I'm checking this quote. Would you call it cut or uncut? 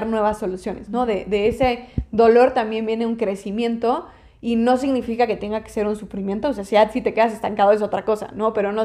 uncut